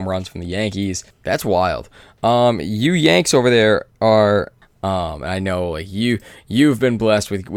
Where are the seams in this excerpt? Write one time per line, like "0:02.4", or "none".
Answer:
0:01.1
0:04.6

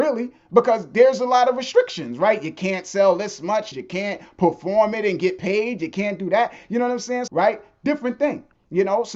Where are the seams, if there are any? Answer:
0:03.7
0:07.3

